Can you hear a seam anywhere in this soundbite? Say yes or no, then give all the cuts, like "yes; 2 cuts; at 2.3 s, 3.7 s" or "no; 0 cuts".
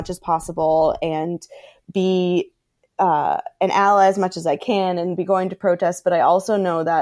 no; 0 cuts